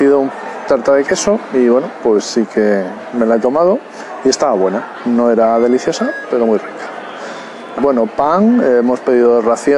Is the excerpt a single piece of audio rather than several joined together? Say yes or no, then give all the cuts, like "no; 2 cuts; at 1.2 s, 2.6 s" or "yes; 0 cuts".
no; 2 cuts; at 6.2 s, 7.8 s